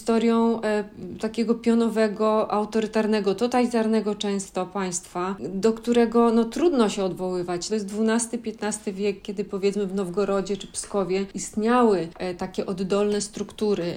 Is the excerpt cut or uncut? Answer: cut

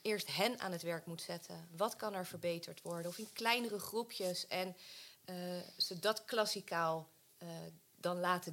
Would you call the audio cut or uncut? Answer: uncut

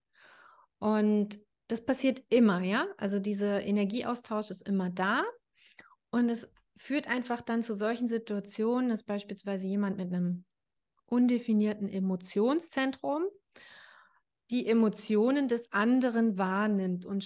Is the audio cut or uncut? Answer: uncut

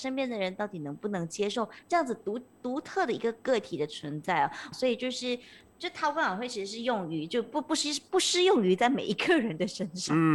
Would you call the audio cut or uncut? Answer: cut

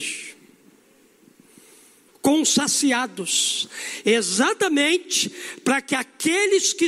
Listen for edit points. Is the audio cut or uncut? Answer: cut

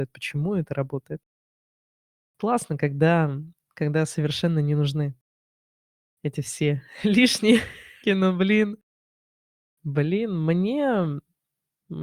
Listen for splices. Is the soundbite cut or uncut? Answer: cut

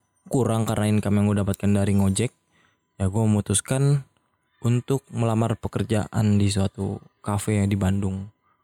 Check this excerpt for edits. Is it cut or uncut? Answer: uncut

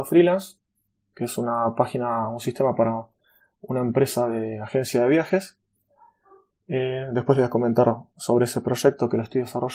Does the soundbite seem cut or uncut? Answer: uncut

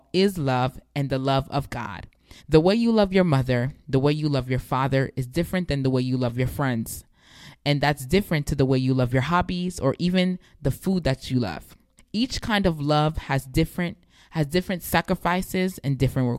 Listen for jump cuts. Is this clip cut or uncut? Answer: cut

